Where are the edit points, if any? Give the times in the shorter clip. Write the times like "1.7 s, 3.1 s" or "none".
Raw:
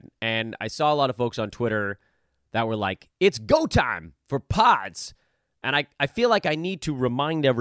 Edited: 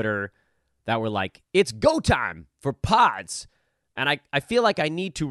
none